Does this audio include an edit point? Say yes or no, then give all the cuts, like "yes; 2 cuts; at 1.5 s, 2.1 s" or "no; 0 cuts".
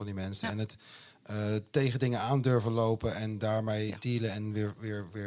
yes; 1 cut; at 1.7 s